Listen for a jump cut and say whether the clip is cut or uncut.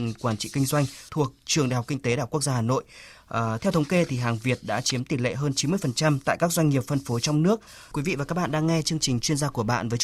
cut